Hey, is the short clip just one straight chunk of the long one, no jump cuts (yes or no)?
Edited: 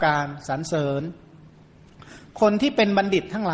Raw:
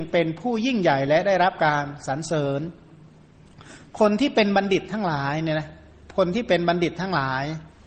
yes